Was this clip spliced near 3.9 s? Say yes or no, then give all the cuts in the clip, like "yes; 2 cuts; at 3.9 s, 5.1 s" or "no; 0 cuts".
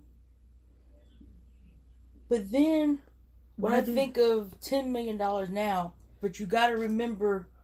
no; 1 cut; at 6.2 s